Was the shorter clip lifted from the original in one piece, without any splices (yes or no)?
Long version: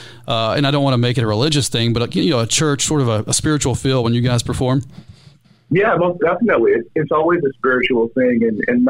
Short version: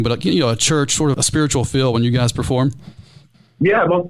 no